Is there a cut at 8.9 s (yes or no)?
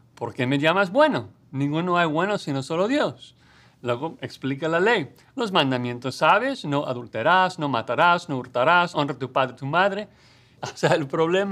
yes